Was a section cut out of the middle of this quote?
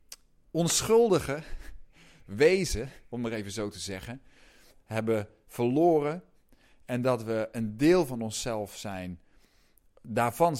no; 0 cuts

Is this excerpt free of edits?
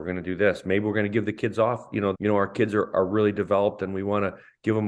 no; 1 cut; at 2.1 s

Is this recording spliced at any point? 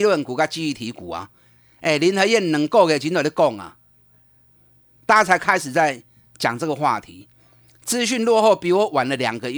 yes; 1 cut; at 5.0 s

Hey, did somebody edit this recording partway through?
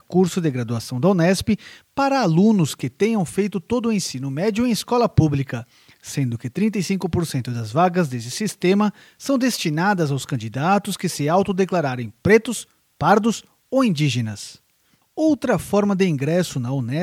yes; 1 cut; at 15.0 s

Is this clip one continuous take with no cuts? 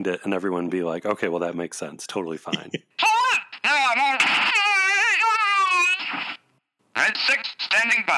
no; 1 cut; at 2.9 s

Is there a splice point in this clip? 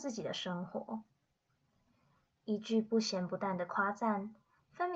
no; 0 cuts

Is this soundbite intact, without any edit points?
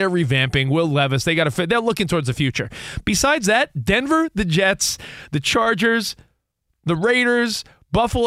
yes; 0 cuts

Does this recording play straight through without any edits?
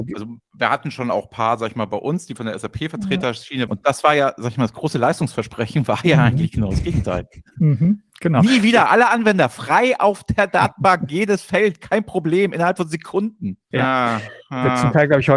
no; 1 cut; at 3.7 s

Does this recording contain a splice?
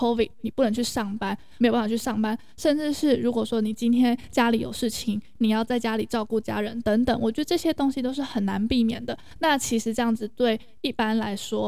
yes; 2 cuts; at 1.6 s, 9.4 s

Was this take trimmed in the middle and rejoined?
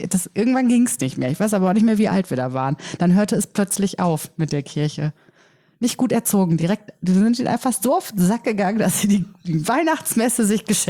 no; 0 cuts

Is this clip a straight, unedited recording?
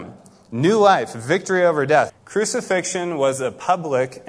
no; 1 cut; at 2.1 s

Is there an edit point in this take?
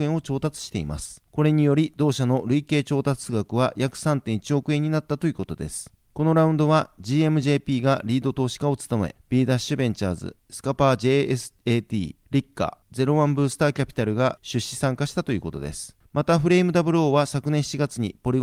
no; 0 cuts

